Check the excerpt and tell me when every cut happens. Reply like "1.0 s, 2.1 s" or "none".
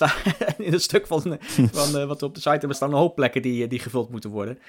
2.7 s